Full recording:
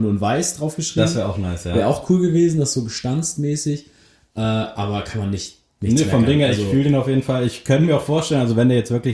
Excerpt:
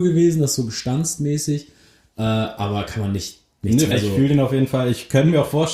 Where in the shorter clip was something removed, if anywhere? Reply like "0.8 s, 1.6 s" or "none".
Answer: 3.9 s